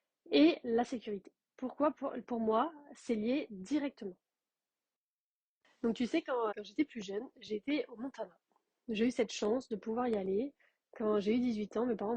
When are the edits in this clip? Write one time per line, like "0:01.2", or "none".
0:06.5